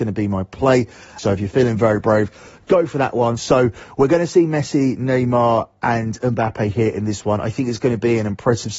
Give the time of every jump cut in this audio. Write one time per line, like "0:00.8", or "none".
0:01.2
0:03.4